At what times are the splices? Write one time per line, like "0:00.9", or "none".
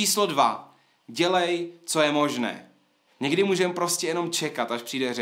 0:03.1